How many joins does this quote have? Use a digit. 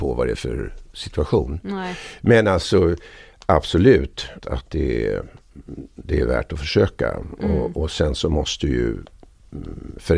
1